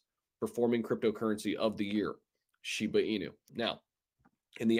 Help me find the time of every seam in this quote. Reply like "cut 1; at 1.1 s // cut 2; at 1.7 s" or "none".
cut 1; at 3.5 s